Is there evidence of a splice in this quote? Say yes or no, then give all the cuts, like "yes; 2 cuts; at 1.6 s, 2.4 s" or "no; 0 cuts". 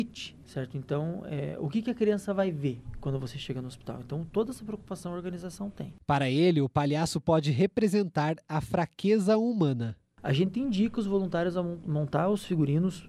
no; 0 cuts